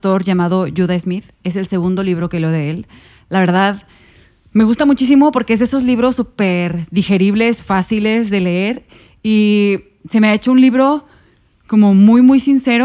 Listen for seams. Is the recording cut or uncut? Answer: uncut